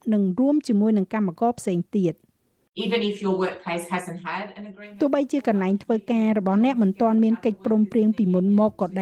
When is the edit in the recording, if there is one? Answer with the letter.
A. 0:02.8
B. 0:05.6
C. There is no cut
C